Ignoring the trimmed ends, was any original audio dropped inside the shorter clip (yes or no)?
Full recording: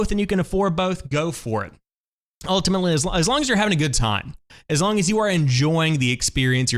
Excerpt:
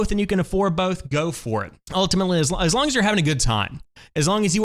yes